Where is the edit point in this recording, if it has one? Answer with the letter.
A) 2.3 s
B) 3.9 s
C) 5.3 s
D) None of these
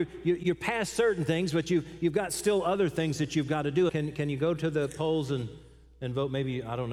B